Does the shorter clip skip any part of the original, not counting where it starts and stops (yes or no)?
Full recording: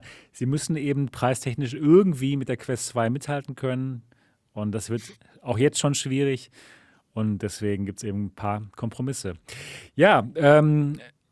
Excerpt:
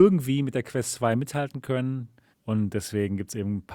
yes